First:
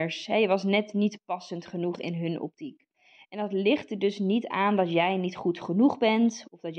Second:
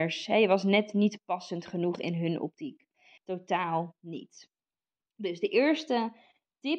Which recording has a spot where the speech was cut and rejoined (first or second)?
second